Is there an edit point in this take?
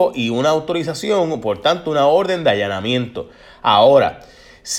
no; 0 cuts

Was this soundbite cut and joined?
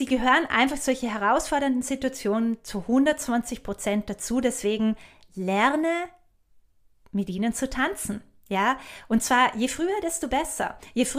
no; 0 cuts

